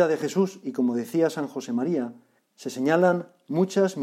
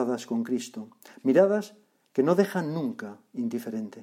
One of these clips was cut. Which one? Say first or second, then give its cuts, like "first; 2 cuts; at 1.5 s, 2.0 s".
first; 1 cut; at 2.4 s